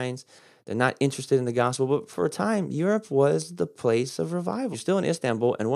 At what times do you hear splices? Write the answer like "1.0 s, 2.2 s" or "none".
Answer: 4.7 s